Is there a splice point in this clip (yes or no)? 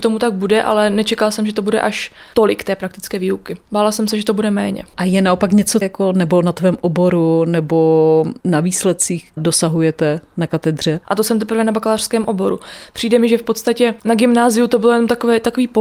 yes